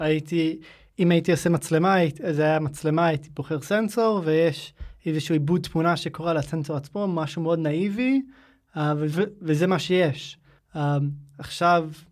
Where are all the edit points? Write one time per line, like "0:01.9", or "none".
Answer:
0:10.6

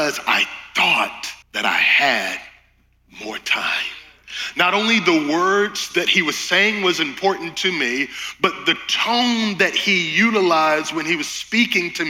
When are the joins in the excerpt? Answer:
0:01.4

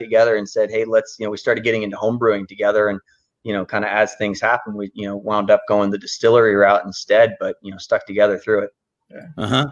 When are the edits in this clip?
none

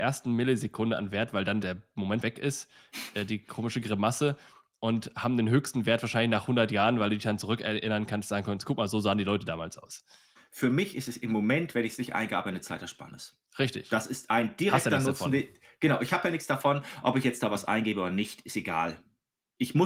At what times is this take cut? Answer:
0:02.2
0:10.4

